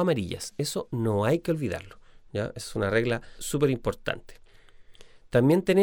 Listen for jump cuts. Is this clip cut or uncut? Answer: cut